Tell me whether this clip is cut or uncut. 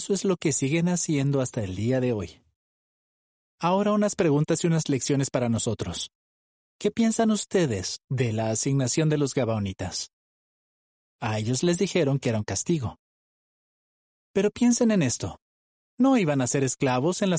uncut